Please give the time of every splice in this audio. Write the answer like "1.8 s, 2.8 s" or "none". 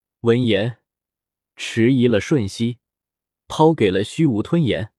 1.4 s, 3.4 s